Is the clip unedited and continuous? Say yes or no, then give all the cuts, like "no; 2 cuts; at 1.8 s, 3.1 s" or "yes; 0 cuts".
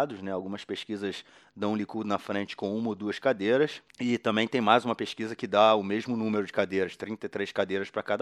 no; 1 cut; at 3.9 s